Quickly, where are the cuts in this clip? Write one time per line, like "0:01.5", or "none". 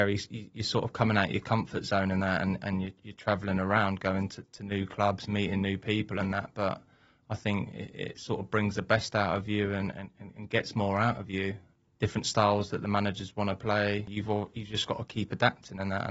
none